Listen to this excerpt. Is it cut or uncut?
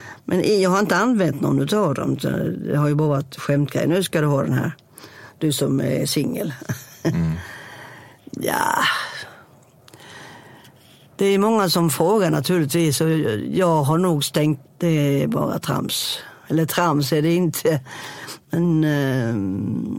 cut